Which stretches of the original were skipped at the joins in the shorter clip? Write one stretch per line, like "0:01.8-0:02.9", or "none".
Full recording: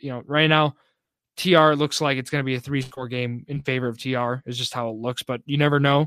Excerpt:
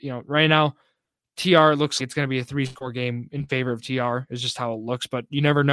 0:02.0-0:02.2